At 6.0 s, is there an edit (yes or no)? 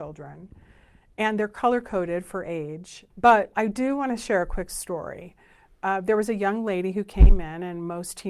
no